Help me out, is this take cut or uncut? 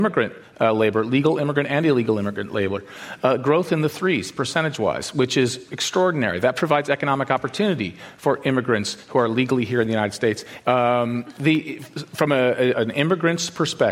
cut